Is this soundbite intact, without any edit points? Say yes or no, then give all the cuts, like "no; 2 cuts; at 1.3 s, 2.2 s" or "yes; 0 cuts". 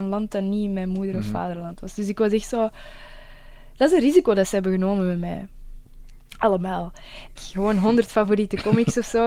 no; 1 cut; at 7.4 s